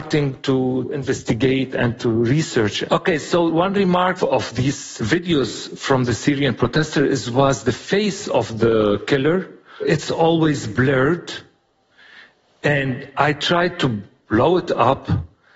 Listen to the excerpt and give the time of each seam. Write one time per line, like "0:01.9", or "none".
none